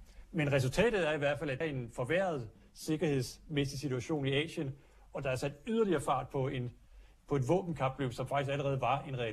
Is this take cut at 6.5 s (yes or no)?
no